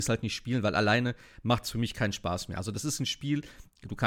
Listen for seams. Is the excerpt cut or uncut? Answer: uncut